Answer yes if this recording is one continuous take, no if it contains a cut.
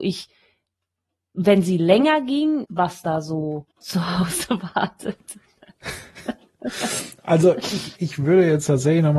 no